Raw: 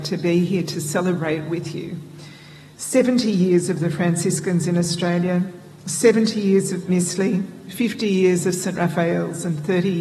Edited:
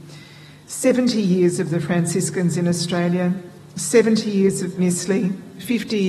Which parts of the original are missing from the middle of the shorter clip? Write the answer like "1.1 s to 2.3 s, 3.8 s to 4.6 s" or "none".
none